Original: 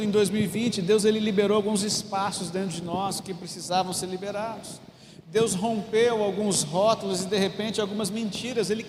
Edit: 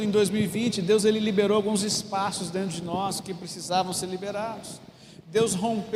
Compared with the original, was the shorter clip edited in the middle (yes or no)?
no